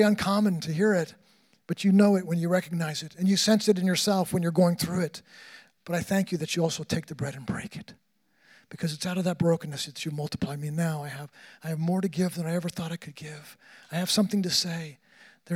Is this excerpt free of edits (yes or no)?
no